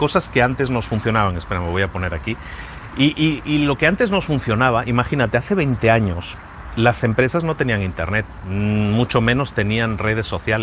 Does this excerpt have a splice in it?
no; 0 cuts

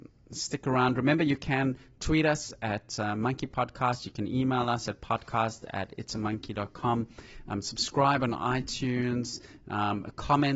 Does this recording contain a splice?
no; 0 cuts

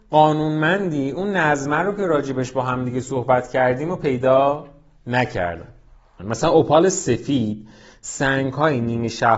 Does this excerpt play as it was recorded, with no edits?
no; 1 cut; at 6.2 s

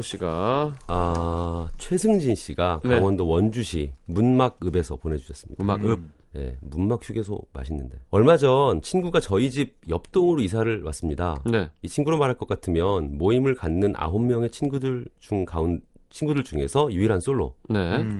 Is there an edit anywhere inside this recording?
yes; 1 cut; at 8.1 s

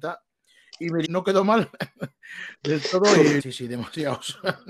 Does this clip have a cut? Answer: yes; 2 cuts; at 1.0 s, 3.4 s

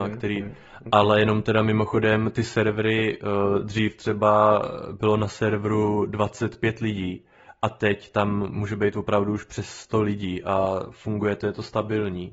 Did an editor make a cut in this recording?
no; 0 cuts

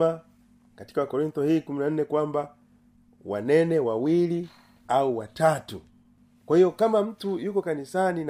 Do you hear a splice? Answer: no; 0 cuts

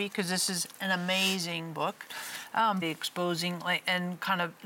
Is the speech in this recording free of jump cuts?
no; 1 cut; at 2.8 s

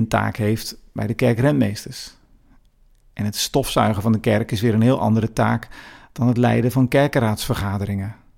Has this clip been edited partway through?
no; 0 cuts

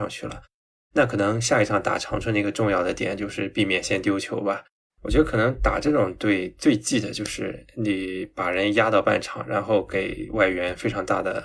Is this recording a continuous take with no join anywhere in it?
no; 1 cut; at 4.9 s

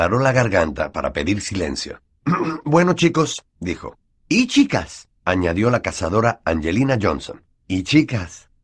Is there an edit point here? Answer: no; 0 cuts

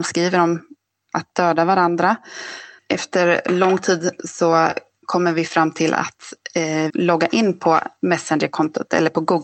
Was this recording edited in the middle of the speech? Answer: yes; 2 cuts; at 2.8 s, 6.9 s

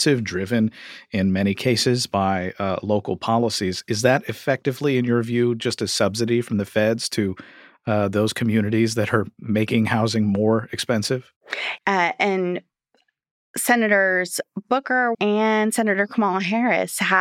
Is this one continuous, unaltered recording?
no; 2 cuts; at 11.8 s, 15.1 s

